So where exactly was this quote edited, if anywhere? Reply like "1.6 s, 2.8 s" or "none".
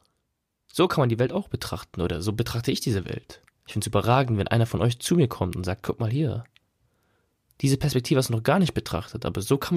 3.5 s